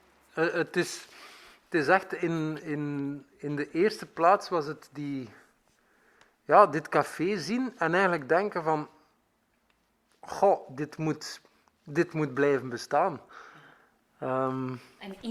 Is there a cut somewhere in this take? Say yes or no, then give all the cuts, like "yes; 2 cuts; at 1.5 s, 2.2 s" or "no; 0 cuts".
no; 0 cuts